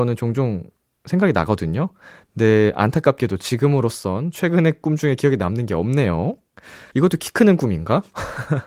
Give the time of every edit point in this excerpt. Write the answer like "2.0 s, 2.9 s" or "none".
4.8 s, 6.9 s